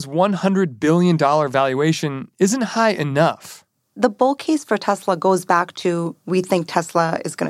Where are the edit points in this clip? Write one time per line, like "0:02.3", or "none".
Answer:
none

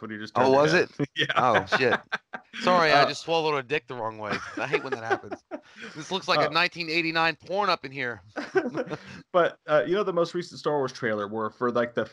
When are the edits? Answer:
none

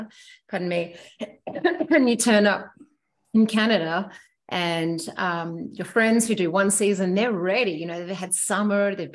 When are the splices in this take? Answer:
none

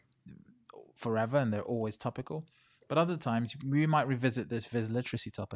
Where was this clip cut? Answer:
none

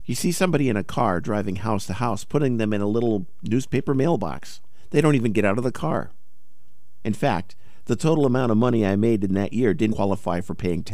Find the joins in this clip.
0:07.0
0:09.9

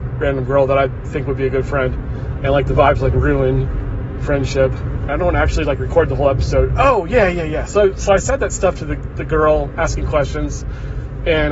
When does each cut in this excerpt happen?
0:05.1

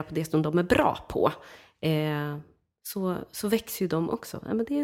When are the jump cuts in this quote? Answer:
none

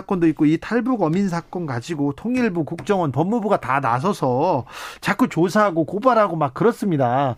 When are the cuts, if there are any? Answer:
none

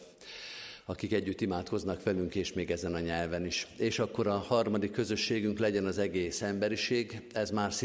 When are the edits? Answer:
none

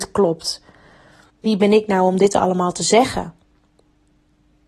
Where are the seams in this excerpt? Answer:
0:01.3

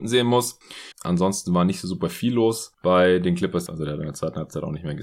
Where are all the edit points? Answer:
0:00.9
0:03.7

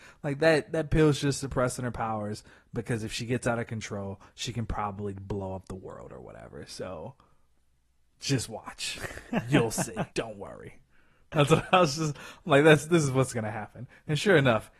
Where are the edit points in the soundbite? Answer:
0:10.1
0:11.7

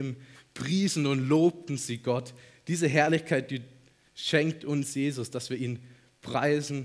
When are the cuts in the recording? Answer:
none

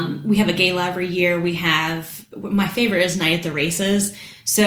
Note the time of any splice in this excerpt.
none

